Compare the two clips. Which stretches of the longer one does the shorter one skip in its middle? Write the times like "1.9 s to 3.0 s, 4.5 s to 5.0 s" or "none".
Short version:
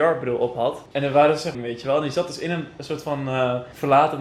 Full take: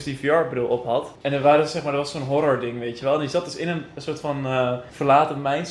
1.8 s to 2.7 s